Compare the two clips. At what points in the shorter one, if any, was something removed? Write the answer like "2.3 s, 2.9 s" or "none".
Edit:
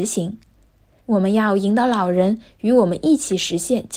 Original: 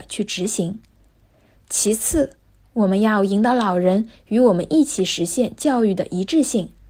1.0 s